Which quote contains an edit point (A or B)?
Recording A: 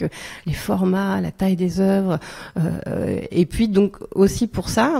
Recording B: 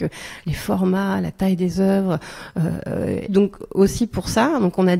B